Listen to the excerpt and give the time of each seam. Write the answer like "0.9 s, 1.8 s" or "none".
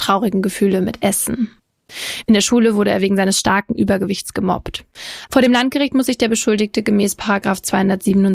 5.3 s